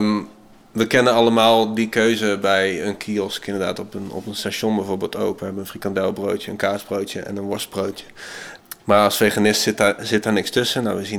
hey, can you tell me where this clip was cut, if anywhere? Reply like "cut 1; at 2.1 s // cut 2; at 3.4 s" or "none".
none